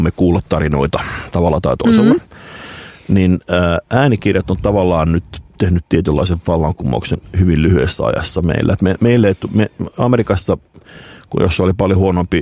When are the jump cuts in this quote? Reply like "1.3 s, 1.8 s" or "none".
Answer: none